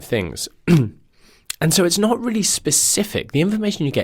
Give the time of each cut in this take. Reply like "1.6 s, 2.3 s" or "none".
none